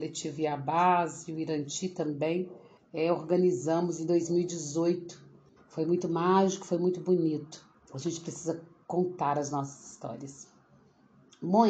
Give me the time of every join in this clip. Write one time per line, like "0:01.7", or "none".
0:05.6